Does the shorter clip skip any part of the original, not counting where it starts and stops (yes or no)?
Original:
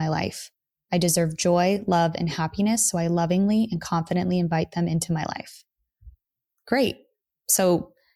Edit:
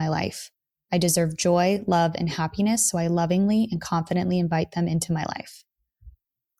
no